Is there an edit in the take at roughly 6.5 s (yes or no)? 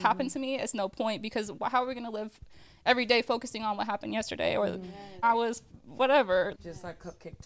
yes